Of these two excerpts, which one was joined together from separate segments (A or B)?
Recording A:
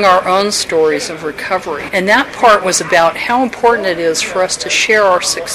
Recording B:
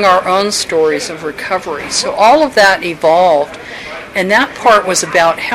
A